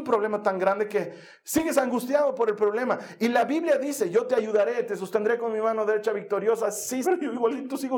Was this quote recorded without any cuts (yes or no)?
no